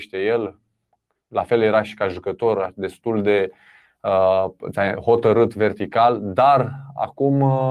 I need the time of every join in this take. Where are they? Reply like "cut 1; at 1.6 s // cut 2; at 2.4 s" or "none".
none